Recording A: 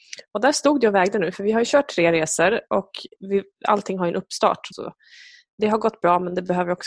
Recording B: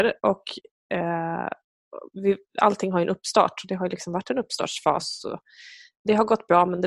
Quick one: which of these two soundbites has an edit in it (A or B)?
A